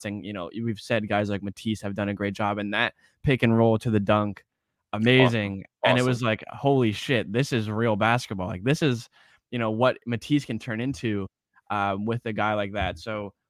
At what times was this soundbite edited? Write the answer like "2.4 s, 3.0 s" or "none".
none

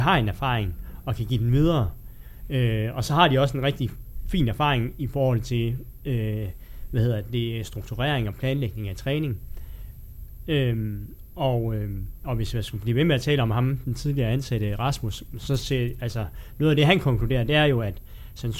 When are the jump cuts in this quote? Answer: none

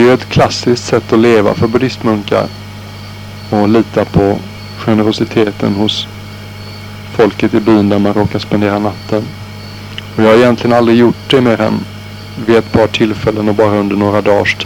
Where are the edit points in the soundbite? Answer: 3.5 s

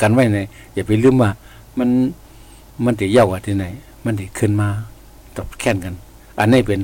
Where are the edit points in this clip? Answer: none

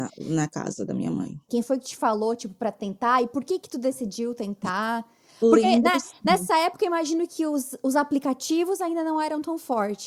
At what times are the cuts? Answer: 1.5 s

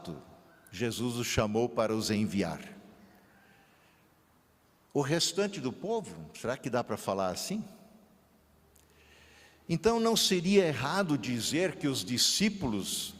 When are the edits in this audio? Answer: none

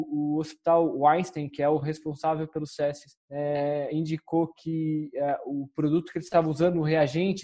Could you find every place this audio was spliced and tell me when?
none

